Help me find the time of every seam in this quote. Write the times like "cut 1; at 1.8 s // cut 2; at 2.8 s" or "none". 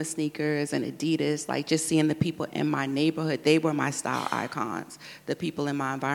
none